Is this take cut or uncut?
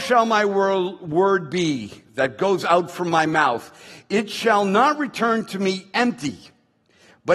uncut